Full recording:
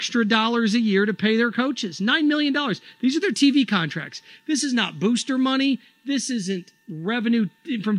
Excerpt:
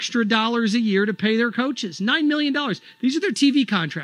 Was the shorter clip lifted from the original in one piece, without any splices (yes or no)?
yes